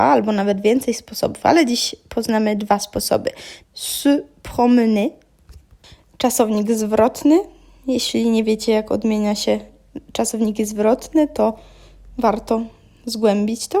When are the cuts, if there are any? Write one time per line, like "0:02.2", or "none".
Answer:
0:03.6